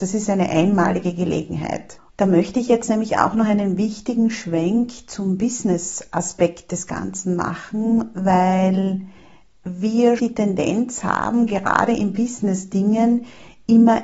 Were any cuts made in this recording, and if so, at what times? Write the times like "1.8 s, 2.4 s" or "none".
2.1 s, 10.2 s